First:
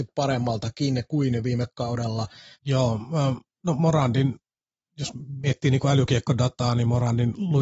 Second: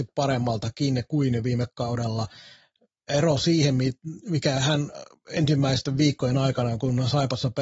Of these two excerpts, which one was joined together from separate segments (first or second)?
first